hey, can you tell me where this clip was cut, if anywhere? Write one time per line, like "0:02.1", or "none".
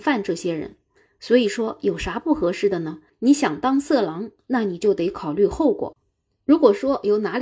0:03.1